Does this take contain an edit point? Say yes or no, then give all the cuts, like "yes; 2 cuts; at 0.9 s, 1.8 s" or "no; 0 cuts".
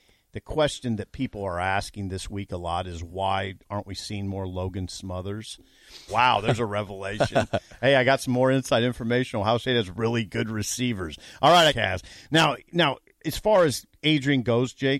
yes; 2 cuts; at 6.1 s, 11.7 s